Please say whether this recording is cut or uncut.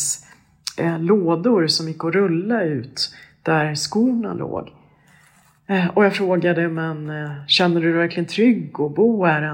uncut